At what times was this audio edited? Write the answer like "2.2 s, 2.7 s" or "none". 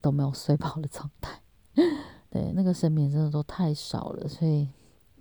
2.5 s